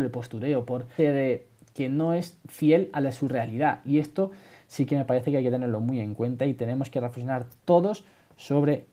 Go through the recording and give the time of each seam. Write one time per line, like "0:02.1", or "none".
0:01.0